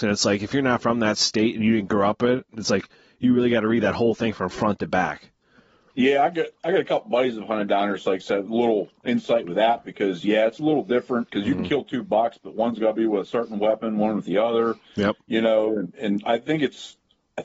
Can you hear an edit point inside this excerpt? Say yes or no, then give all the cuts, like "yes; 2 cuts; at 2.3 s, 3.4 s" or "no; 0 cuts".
no; 0 cuts